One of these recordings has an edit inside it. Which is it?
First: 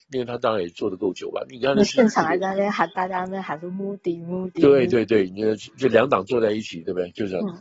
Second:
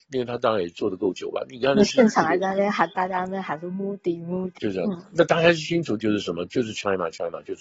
second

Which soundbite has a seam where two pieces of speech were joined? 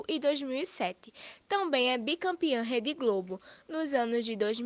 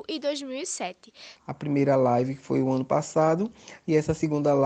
second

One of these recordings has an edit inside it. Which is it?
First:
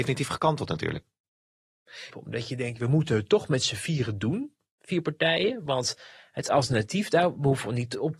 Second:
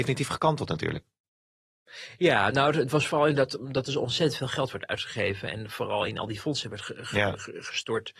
first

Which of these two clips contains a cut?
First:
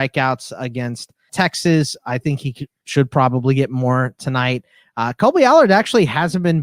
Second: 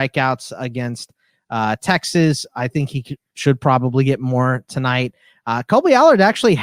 first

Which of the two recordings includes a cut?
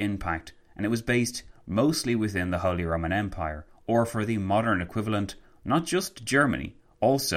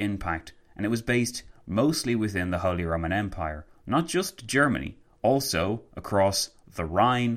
second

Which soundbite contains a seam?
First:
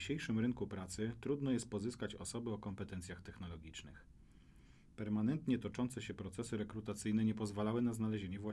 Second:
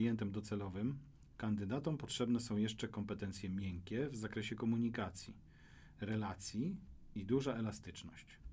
second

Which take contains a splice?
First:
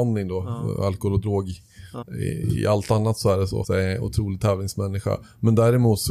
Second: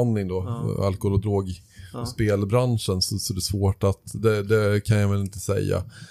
first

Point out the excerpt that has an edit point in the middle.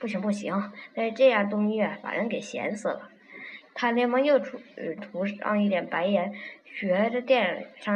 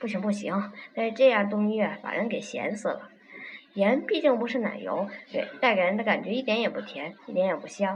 first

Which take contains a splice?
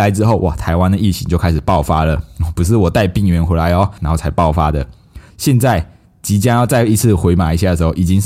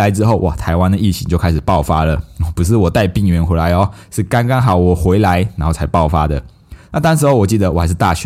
first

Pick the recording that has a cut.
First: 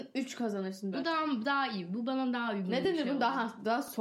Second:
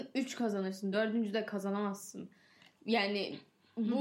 first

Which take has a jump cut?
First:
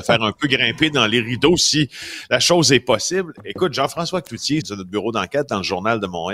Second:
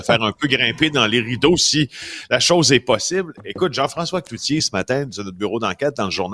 first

